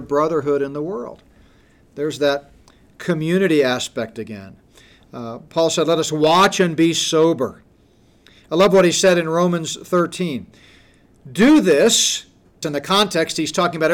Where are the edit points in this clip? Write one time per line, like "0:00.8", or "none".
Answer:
0:12.6